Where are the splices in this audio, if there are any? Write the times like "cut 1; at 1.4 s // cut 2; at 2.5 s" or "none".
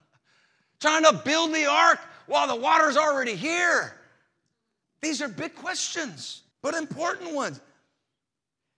cut 1; at 4.8 s // cut 2; at 6.5 s